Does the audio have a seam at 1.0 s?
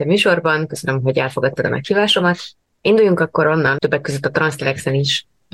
no; 2 cuts; at 2.7 s, 3.8 s

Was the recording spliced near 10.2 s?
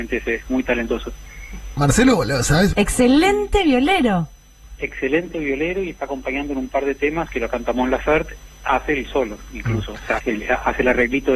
yes; 3 cuts; at 2.7 s, 7.3 s, 10.2 s

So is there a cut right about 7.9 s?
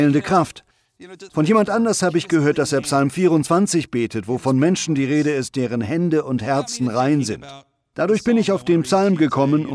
no; 1 cut; at 1.3 s

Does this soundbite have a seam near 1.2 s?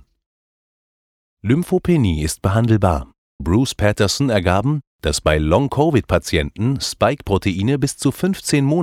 no; 1 cut; at 3.4 s

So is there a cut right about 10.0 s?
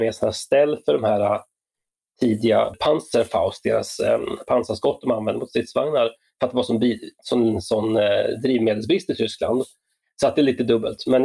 yes; 1 cut; at 10.0 s

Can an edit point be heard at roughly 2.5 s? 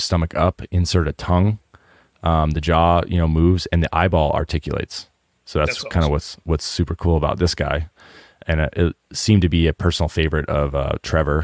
no; 0 cuts

